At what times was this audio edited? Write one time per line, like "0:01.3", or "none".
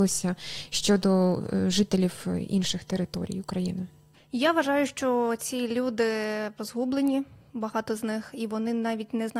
0:06.6

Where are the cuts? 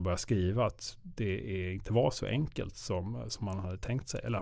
none

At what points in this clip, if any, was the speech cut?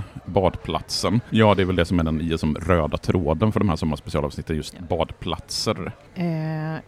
0:01.3

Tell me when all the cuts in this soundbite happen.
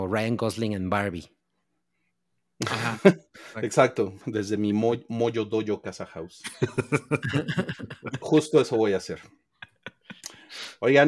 0:08.2

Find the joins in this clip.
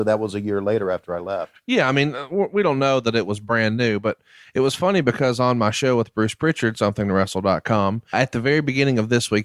0:06.7
0:08.1

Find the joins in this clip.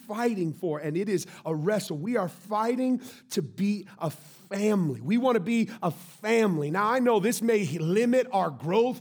none

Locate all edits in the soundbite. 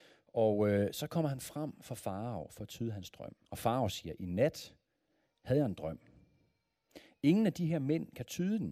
0:03.4

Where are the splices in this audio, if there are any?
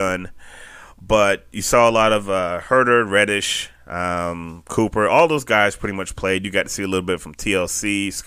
none

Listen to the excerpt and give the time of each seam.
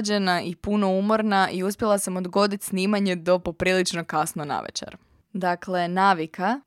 0:05.2

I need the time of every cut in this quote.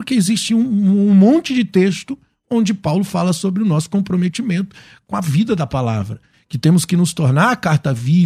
none

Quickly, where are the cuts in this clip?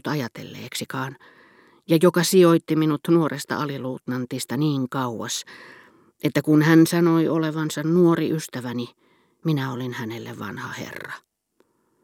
none

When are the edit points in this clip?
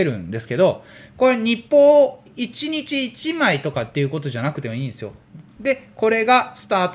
0:05.6

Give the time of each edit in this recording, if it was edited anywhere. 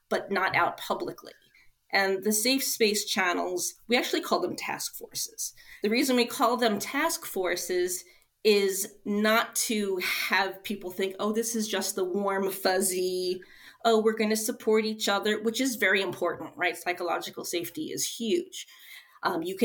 none

